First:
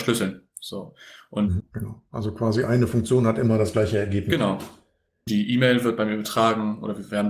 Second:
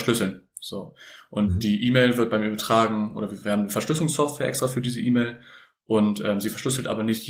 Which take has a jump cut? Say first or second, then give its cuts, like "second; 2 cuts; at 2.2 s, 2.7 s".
first; 2 cuts; at 1.6 s, 5.3 s